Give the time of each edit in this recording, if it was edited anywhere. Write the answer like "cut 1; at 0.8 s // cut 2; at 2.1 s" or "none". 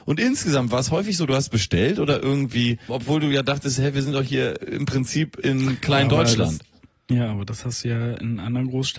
cut 1; at 2.9 s